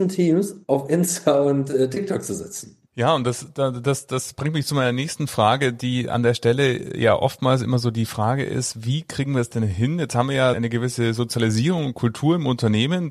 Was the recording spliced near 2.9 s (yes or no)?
yes